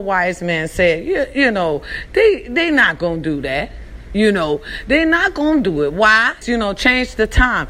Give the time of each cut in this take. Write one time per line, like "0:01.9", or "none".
0:06.4